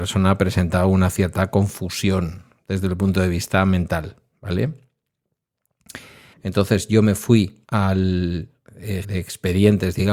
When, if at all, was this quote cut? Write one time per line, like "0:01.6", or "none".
0:06.3
0:07.6
0:09.0